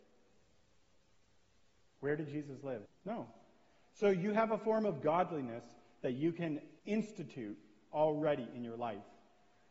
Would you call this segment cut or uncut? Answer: cut